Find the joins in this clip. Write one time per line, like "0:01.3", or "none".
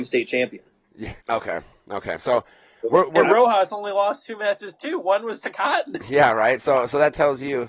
0:01.2